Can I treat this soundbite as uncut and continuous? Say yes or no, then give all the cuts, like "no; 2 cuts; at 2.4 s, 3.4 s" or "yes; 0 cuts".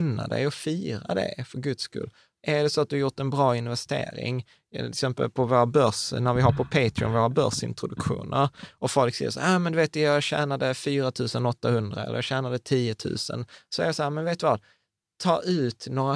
yes; 0 cuts